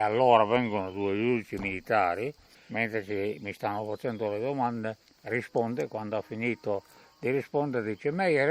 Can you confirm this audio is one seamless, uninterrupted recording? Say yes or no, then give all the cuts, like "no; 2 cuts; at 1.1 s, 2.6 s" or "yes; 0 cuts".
no; 2 cuts; at 2.5 s, 5.0 s